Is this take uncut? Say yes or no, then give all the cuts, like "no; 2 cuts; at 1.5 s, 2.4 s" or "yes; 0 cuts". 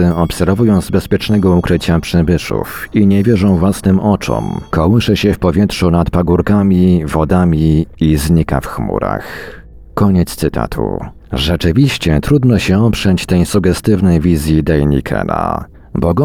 no; 1 cut; at 4.7 s